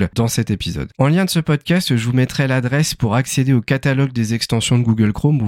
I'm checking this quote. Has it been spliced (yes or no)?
yes